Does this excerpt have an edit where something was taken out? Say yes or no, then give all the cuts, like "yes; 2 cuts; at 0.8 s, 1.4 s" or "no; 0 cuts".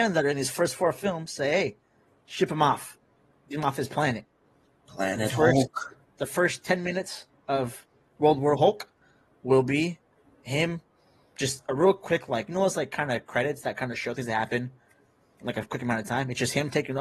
no; 0 cuts